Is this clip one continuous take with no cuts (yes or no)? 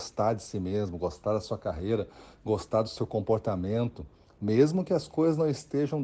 yes